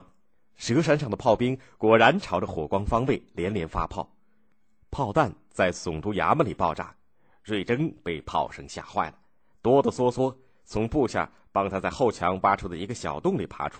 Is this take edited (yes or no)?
no